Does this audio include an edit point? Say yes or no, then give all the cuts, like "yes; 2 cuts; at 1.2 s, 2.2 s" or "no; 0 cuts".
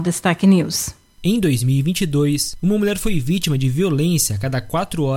no; 0 cuts